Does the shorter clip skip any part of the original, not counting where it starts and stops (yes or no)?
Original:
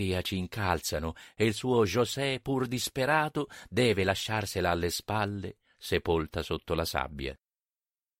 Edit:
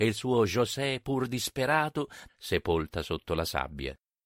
yes